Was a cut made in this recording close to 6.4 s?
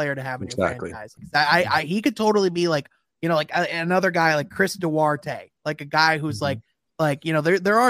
no; 1 cut; at 1.2 s

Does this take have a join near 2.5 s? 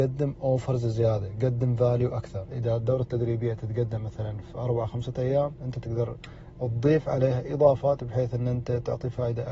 yes; 1 cut; at 2.5 s

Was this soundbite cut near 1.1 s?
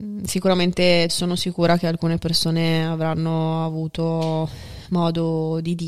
yes; 1 cut; at 1.1 s

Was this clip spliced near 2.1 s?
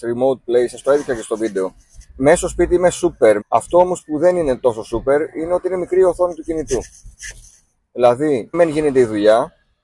yes; 3 cuts; at 2.1 s, 3.4 s, 8.5 s

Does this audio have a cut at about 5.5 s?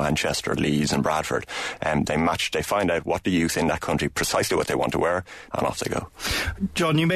yes; 1 cut; at 5.5 s

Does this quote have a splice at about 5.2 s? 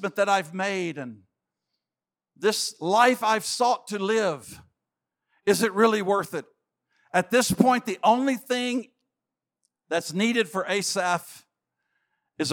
no; 0 cuts

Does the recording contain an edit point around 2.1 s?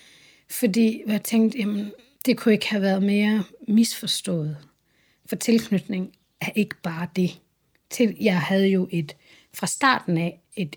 yes; 1 cut; at 2.1 s

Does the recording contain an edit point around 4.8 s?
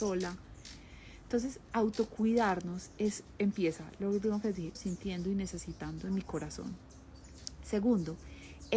yes; 1 cut; at 4.8 s

